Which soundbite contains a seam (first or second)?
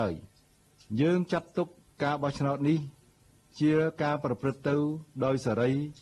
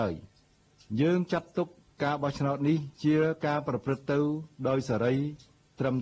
second